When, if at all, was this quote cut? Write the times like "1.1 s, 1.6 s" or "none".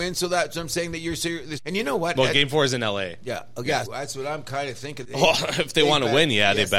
1.6 s, 3.8 s, 5.0 s